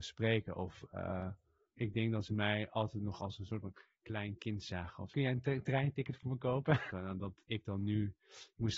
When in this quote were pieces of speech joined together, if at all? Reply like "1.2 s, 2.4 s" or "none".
1.7 s, 5.1 s, 6.9 s